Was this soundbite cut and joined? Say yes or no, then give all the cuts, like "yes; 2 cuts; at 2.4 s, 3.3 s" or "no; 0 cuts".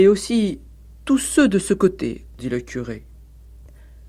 yes; 1 cut; at 2.4 s